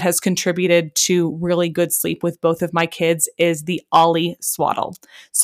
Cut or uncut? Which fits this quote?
uncut